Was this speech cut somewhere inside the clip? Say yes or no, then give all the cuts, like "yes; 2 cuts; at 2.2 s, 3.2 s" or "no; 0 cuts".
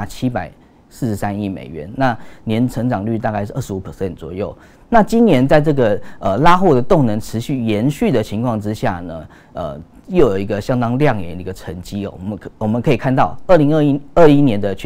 no; 0 cuts